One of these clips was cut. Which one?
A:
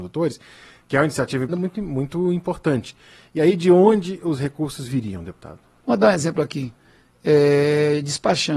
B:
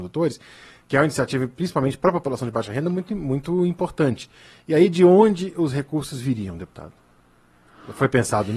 A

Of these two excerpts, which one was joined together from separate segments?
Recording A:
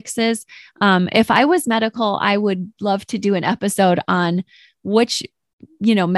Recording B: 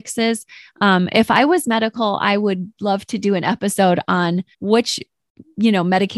B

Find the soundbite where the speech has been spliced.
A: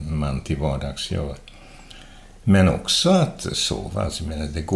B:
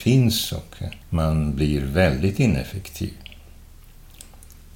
B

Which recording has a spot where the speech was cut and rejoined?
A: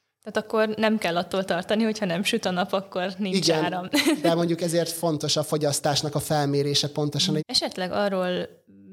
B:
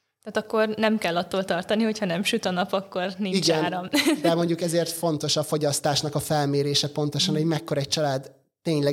A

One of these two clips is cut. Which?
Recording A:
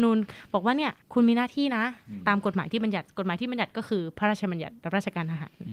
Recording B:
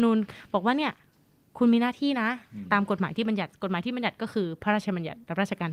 A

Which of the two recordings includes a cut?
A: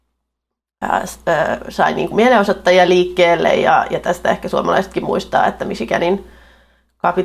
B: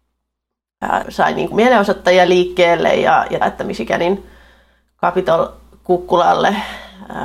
B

